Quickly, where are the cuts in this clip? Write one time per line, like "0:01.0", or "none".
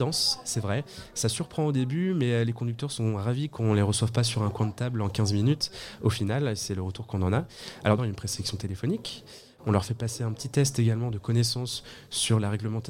0:08.0
0:09.6